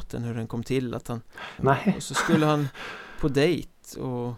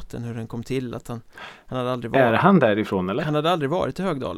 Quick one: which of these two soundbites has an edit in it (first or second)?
first